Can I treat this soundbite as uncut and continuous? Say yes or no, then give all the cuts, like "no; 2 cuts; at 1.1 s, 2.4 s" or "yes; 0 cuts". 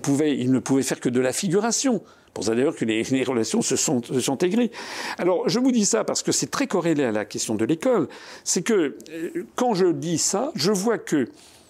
yes; 0 cuts